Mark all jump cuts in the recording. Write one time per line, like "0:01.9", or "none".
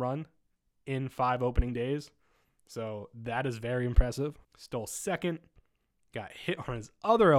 0:04.4